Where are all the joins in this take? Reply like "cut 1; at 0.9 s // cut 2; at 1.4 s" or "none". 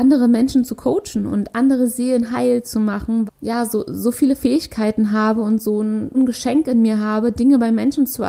cut 1; at 3.3 s // cut 2; at 6.1 s